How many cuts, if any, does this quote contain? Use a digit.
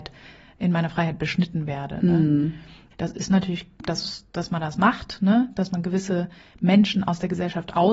1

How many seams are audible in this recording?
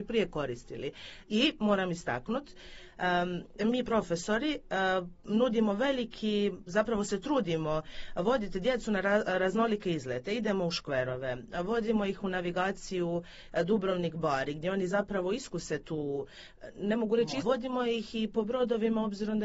1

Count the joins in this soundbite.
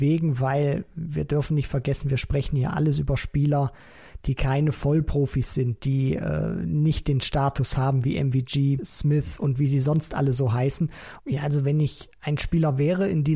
2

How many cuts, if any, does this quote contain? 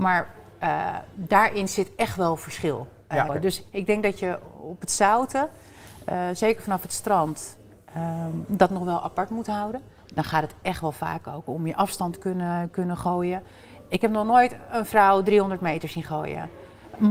2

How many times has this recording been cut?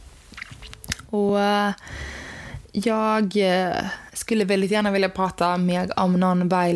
0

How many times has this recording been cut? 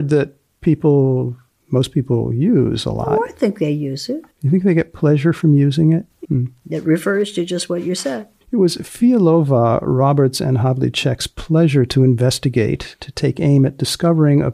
1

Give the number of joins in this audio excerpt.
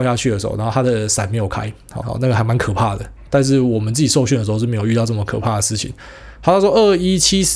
1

